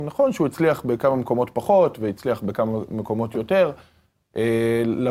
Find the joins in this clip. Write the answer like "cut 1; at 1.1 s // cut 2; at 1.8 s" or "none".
none